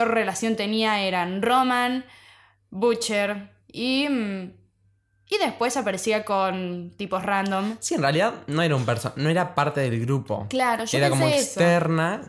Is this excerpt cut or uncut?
uncut